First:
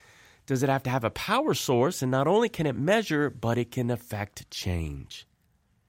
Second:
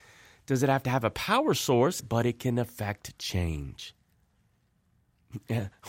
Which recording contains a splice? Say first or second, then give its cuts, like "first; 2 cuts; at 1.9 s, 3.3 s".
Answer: second; 1 cut; at 2.0 s